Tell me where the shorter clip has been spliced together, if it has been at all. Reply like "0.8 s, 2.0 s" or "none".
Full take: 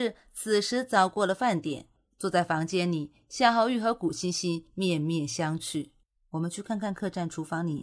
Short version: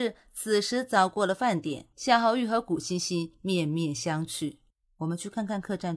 1.9 s